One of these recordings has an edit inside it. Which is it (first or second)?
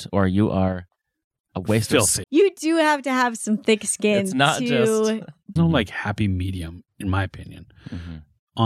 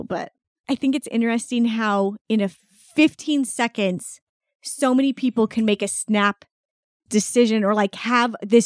first